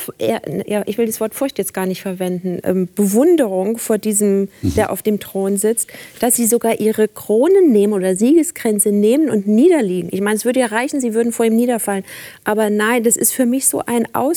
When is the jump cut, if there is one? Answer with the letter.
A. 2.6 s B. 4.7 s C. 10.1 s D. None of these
A